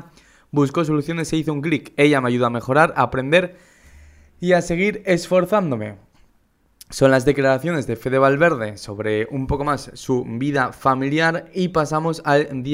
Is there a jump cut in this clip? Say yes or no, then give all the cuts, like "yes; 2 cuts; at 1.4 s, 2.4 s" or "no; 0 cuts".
no; 0 cuts